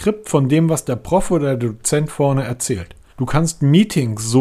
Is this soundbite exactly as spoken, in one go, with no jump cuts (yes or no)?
no